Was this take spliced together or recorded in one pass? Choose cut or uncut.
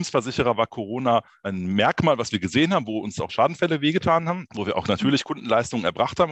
uncut